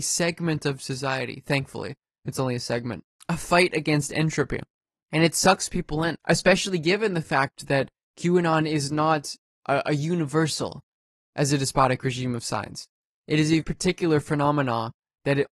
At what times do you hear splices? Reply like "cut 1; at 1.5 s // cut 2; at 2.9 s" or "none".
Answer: cut 1; at 3.2 s // cut 2; at 6.2 s // cut 3; at 13.6 s